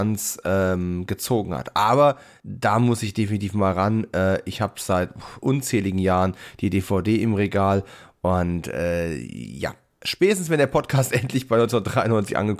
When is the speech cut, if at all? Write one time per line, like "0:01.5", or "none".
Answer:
none